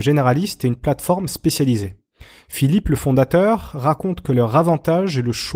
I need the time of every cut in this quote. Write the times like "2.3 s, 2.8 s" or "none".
none

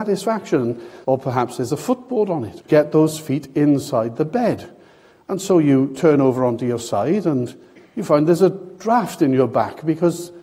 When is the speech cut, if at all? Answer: 1.0 s, 2.6 s

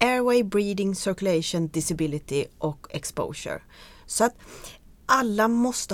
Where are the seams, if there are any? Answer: 4.9 s

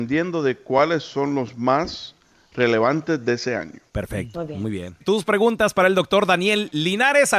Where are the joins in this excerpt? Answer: 5.0 s

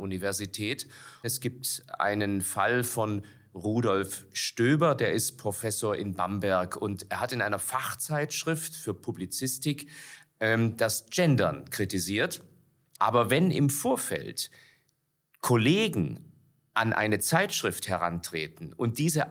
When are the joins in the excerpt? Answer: 1.2 s, 12.9 s

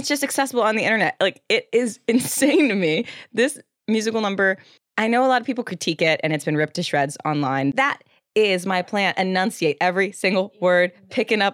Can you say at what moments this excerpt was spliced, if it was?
7.7 s

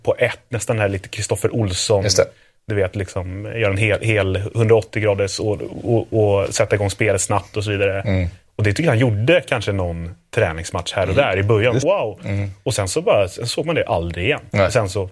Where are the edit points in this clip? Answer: 11.8 s

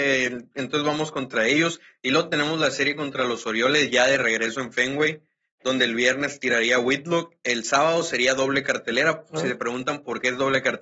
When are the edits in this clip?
none

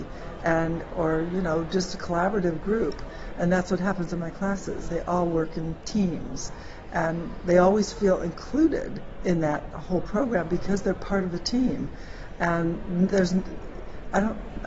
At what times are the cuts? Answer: none

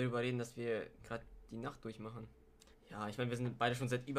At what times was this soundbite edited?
2.7 s

